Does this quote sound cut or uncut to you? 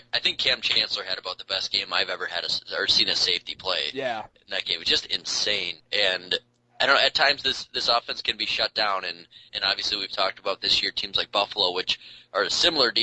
cut